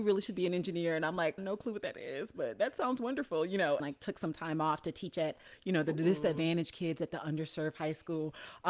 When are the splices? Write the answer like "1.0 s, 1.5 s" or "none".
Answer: 1.4 s, 3.8 s